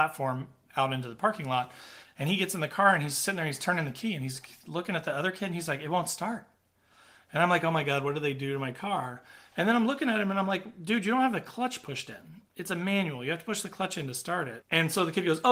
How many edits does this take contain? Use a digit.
1